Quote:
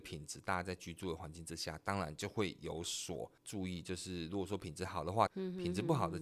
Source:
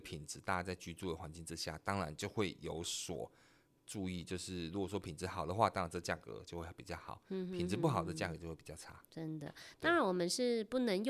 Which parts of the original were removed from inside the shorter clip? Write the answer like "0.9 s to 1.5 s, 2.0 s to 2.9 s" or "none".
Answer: 3.4 s to 3.8 s, 5.7 s to 7.2 s